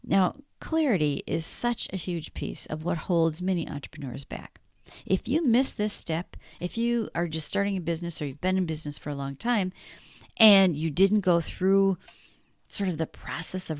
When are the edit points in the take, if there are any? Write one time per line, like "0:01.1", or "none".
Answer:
none